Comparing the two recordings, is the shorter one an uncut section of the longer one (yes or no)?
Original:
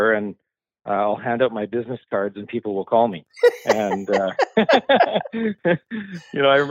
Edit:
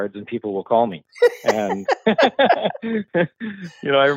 no